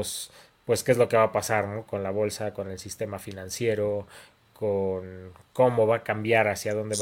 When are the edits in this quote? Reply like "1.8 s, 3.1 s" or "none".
none